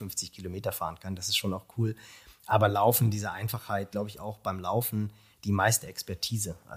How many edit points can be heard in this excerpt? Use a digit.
1